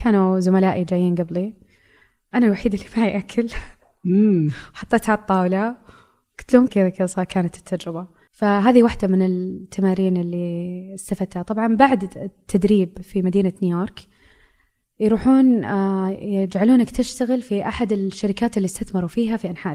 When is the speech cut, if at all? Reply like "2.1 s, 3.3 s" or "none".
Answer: 6.7 s, 8.3 s